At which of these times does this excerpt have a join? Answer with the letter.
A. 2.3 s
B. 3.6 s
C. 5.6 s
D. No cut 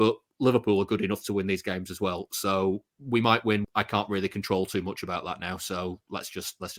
B